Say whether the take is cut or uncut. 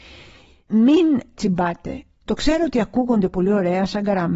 uncut